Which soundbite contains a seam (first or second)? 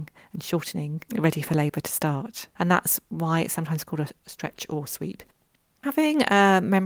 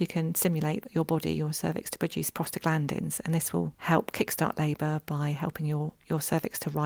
first